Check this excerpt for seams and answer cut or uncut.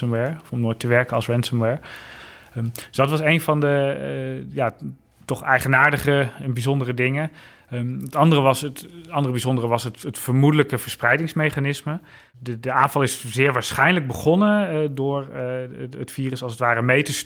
uncut